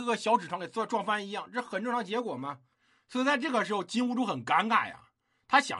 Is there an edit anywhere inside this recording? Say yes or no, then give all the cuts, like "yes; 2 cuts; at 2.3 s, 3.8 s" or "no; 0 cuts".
yes; 1 cut; at 2.7 s